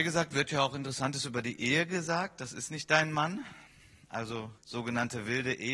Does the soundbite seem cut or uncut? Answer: cut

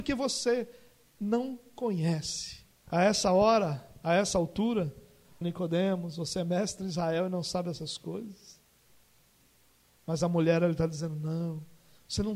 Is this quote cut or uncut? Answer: cut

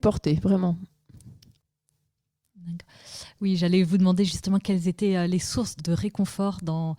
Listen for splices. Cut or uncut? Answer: cut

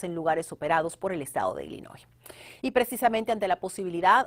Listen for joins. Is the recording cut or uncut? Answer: uncut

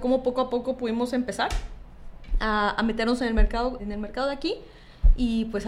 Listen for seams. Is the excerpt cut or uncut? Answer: cut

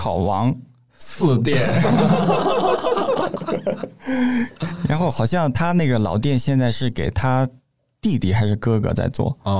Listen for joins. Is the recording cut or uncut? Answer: uncut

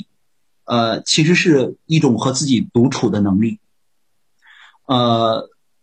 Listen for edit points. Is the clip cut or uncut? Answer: uncut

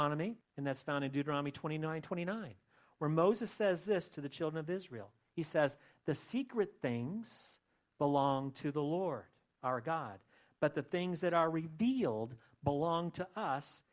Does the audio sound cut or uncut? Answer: uncut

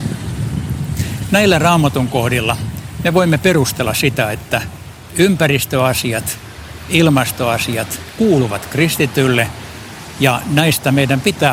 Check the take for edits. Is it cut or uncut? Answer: uncut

